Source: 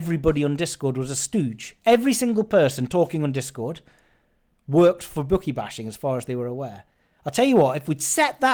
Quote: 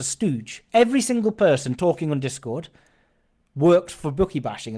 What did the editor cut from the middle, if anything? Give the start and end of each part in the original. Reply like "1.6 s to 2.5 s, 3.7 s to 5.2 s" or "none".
none